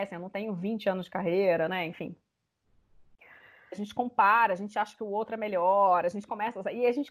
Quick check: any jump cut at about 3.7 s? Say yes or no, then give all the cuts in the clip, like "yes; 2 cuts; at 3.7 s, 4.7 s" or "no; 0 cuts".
yes; 1 cut; at 3.7 s